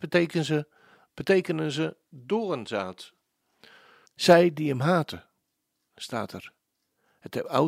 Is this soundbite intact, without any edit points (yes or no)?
no